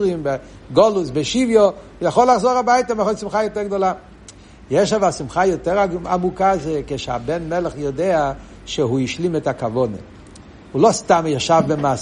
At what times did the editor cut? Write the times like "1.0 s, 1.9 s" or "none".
none